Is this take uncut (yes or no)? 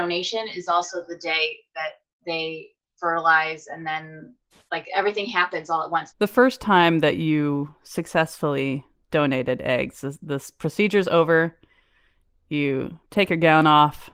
no